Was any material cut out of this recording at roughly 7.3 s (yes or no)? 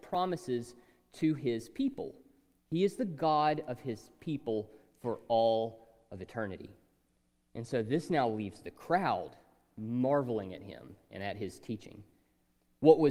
no